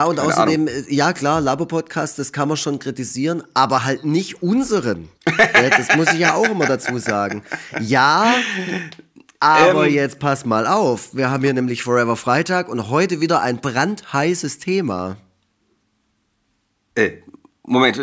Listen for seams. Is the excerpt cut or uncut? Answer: cut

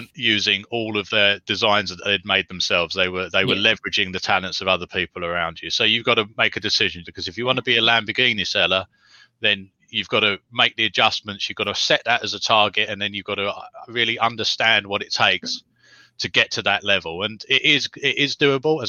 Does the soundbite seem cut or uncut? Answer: cut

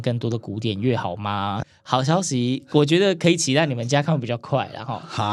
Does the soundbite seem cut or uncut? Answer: cut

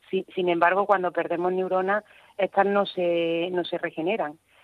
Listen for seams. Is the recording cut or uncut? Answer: uncut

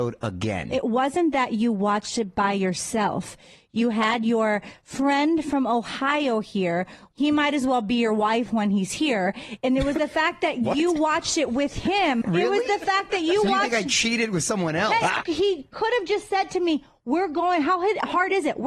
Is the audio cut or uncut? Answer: cut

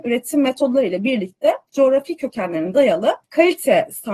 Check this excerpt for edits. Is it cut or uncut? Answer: cut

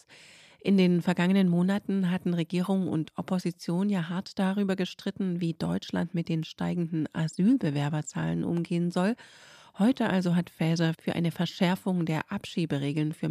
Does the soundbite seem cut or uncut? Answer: uncut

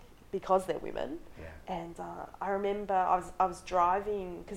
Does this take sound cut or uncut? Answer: cut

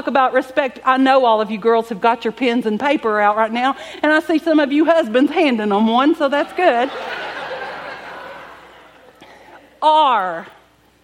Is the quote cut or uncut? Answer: uncut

